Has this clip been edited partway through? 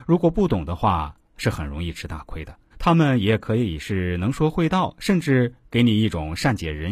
yes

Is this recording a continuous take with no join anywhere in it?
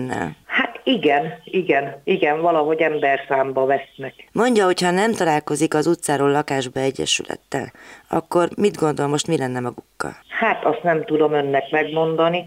yes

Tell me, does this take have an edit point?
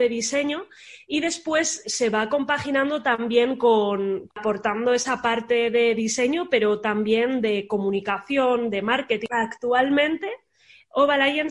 yes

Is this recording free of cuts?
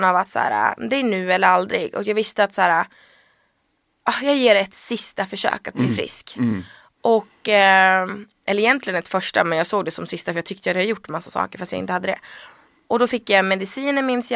yes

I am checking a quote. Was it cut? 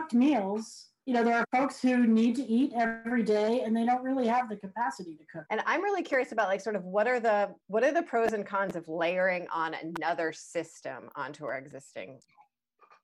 yes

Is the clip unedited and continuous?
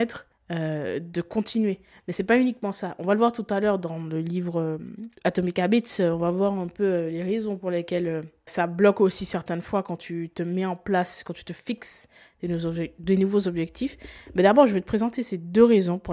no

